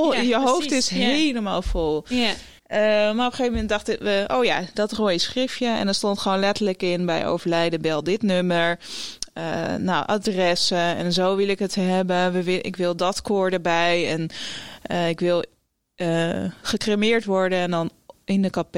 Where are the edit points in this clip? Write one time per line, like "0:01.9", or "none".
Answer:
0:02.6